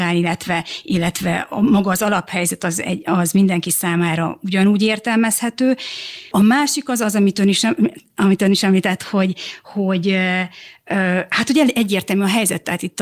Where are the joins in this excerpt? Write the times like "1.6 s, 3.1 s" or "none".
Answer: 6.3 s